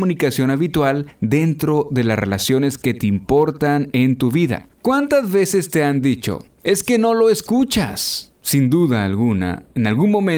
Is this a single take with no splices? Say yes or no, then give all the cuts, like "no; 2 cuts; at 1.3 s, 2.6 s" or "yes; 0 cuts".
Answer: no; 1 cut; at 4.7 s